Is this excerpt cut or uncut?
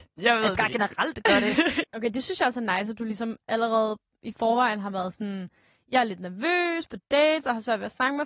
cut